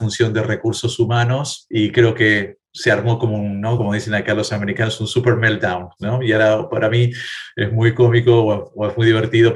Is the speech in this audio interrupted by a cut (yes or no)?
no